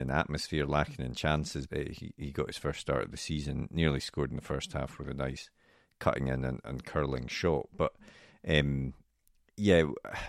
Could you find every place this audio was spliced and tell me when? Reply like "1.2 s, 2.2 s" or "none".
1.7 s